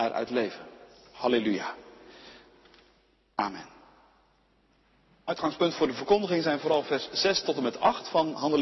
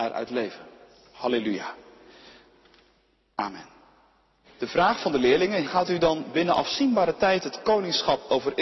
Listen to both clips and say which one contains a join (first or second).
second